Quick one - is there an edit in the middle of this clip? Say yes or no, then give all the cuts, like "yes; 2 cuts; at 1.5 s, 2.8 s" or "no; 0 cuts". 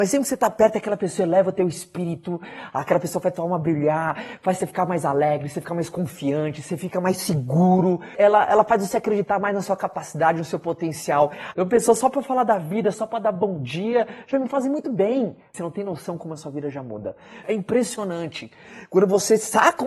yes; 3 cuts; at 11.5 s, 12.9 s, 17.4 s